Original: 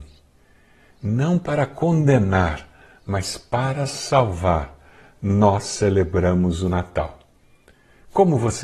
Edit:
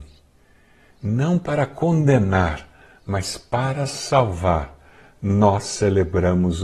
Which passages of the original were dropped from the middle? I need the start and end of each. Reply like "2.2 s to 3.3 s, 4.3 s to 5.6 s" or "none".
none